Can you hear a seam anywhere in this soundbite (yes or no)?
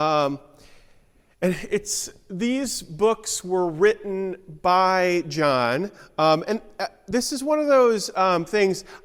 no